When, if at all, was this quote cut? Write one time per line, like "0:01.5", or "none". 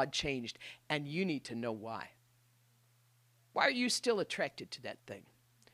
none